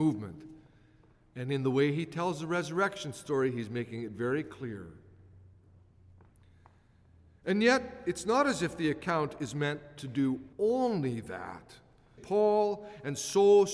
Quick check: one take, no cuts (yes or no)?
no